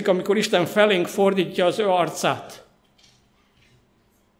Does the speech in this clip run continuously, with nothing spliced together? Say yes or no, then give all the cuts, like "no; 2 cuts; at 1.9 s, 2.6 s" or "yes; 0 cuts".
yes; 0 cuts